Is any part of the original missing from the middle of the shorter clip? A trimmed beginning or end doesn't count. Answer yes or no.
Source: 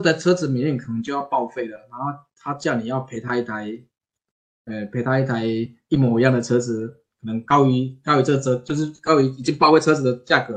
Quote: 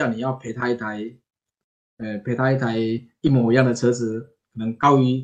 no